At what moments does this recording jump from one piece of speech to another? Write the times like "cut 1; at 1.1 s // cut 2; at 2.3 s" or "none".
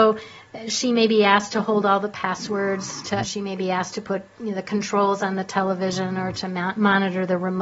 cut 1; at 3.2 s